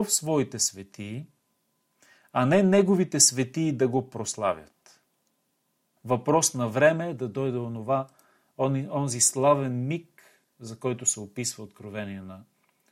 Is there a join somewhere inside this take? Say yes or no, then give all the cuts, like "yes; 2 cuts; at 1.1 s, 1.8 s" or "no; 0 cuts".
yes; 1 cut; at 6.0 s